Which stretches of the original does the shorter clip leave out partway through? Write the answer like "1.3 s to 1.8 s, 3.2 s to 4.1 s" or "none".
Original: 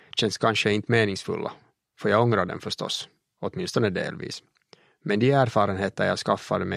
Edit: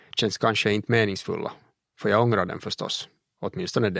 none